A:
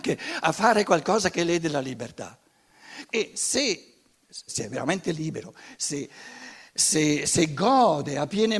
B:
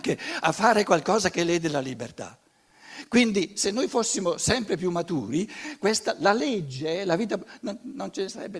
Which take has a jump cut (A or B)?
A